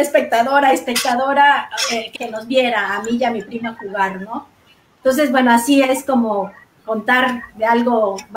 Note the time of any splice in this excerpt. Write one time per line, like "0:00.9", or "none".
0:02.2

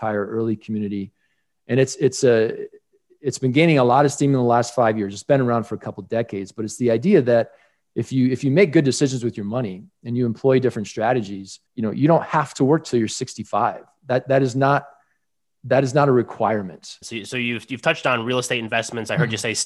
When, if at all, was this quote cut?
0:11.7
0:17.0

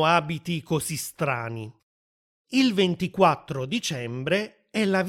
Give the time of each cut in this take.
none

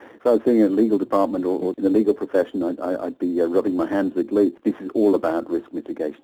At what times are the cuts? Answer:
0:01.7

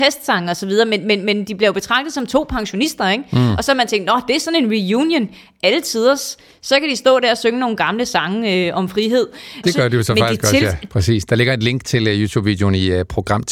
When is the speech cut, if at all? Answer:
0:09.6
0:10.9

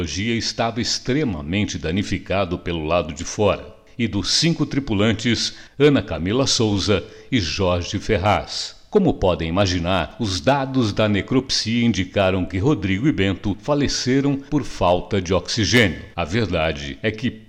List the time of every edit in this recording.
0:05.7
0:16.1

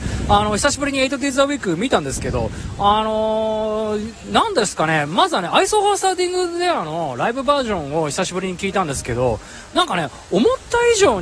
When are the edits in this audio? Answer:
none

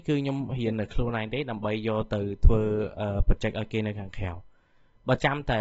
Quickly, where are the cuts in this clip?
none

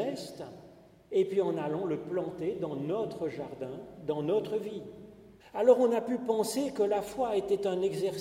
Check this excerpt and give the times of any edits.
0:05.4

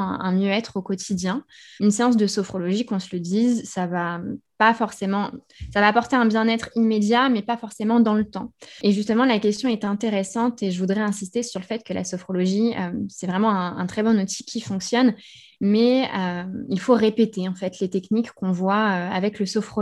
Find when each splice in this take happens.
0:01.8

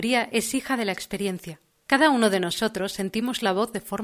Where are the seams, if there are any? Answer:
0:01.9

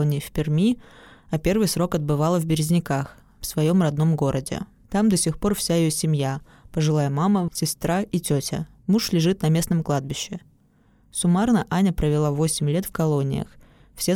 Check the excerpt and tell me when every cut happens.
0:07.5

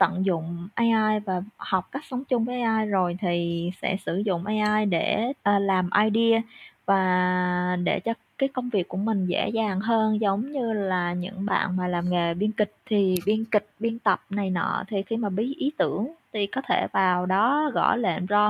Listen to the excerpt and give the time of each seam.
0:05.4
0:12.8

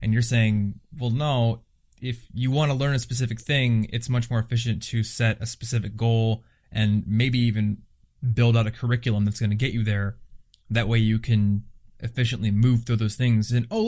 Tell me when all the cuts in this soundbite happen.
none

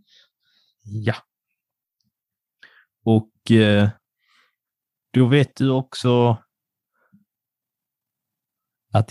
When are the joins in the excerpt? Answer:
none

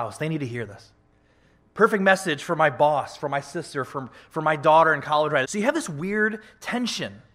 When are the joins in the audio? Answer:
0:03.9
0:05.4

